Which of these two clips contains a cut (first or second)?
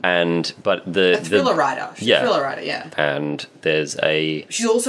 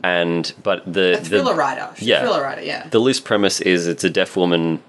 first